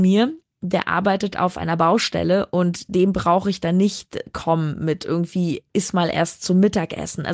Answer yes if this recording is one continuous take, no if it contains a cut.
yes